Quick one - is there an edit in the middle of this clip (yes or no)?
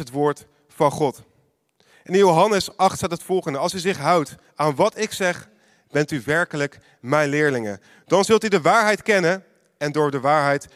no